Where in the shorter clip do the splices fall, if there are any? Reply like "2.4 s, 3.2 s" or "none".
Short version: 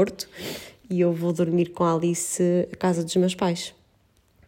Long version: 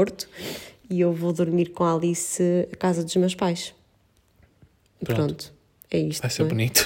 none